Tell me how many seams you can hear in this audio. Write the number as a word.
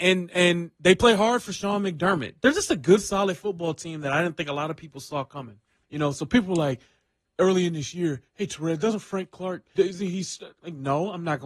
two